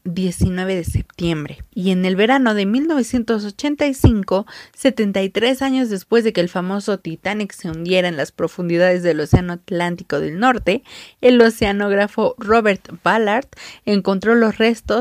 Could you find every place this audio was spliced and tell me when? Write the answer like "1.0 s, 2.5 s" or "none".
1.7 s